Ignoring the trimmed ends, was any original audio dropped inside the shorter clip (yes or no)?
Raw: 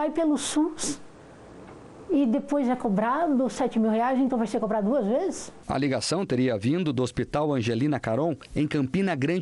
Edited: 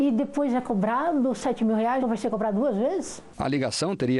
yes